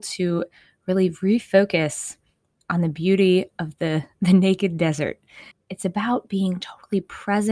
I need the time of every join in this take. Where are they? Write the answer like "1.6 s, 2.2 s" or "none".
5.5 s